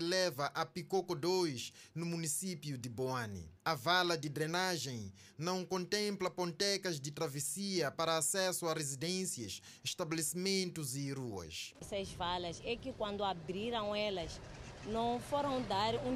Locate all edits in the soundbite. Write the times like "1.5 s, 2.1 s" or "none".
11.8 s

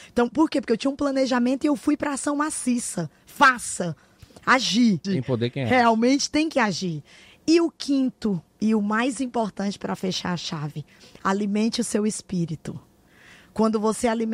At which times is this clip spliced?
5.0 s

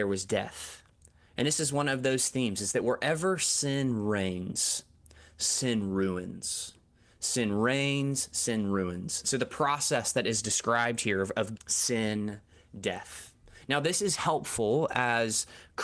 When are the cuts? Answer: 9.2 s, 11.6 s

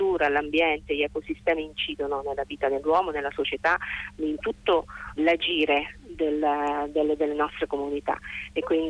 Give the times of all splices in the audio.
5.2 s

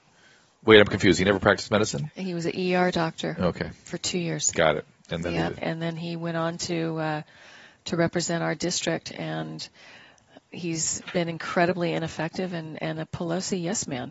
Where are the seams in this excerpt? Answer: 5.6 s

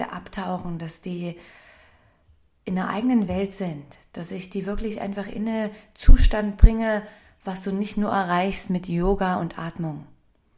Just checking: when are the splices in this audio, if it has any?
none

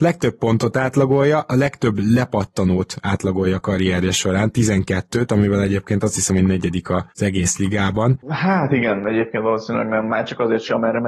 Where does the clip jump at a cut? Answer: 8.2 s

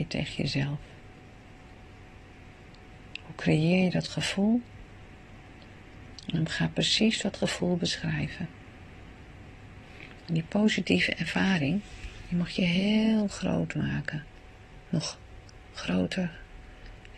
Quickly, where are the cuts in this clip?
none

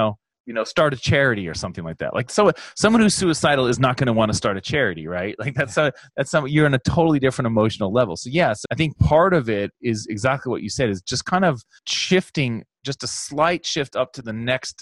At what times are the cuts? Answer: 8.6 s

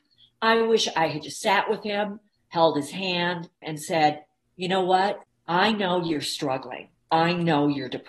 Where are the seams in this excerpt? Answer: 3.6 s

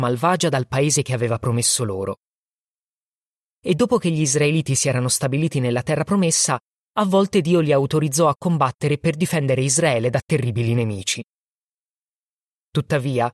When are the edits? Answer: none

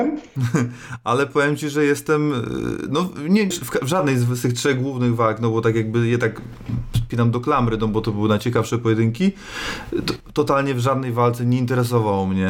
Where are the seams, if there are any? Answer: 3.5 s

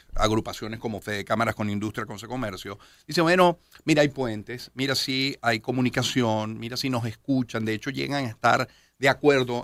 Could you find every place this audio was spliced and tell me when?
none

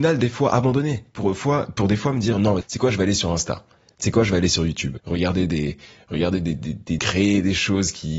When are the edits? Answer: 2.6 s, 5.0 s, 7.0 s

